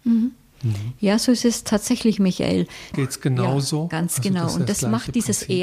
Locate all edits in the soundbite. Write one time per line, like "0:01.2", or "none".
0:02.9